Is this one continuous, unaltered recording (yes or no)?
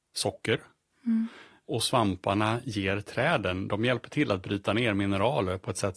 yes